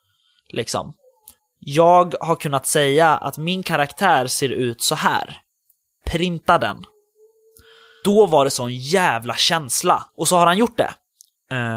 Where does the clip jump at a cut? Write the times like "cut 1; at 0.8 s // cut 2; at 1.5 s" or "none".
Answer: cut 1; at 8.0 s // cut 2; at 10.1 s